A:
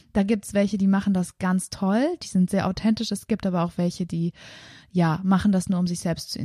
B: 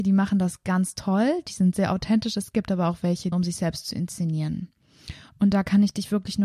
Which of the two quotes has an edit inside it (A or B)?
B